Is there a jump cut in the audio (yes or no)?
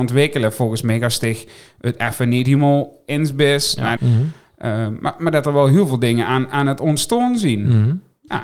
yes